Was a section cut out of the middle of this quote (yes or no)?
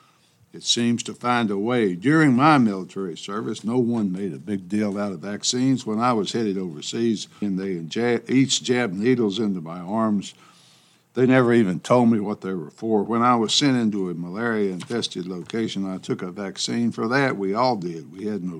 yes